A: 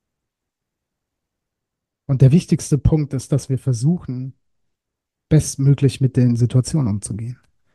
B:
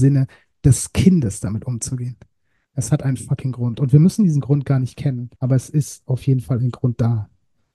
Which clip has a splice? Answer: B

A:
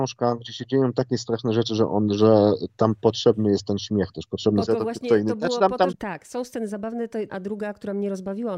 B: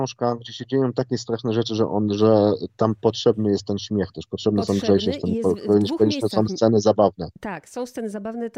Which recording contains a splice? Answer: A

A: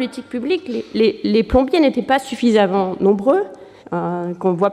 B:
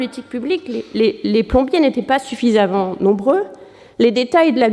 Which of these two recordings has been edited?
A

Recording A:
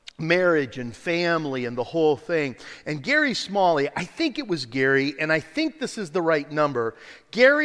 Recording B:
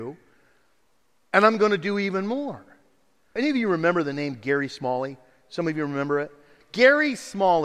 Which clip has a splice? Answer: B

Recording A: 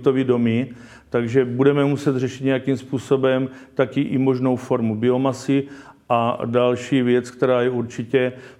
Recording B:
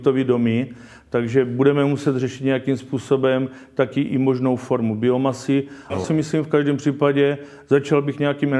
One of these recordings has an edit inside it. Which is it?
B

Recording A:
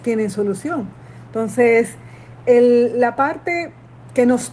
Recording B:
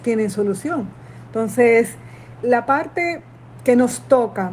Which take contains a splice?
B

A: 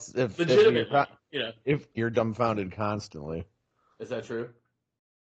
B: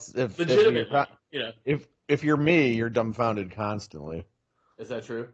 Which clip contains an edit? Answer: A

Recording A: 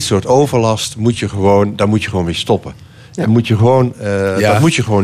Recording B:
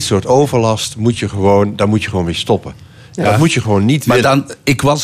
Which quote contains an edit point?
B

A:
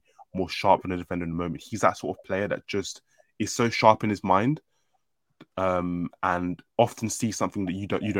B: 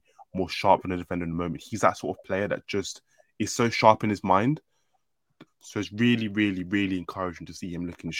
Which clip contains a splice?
B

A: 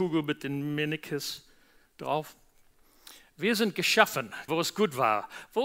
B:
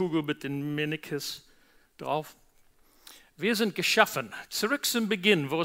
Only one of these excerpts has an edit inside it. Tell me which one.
A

